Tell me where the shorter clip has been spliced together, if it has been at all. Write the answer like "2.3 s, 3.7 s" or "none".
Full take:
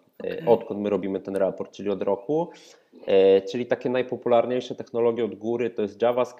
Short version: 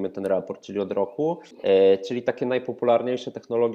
1.5 s